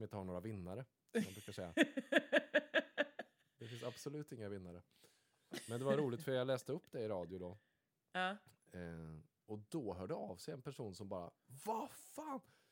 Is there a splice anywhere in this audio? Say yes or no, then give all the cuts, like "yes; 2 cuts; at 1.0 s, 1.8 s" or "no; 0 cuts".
no; 0 cuts